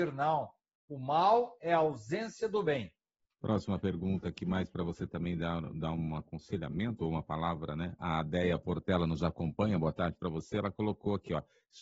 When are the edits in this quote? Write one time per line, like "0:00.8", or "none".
none